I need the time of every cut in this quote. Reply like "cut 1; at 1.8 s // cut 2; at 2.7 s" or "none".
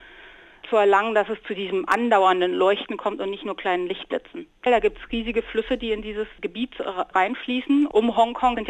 cut 1; at 4.7 s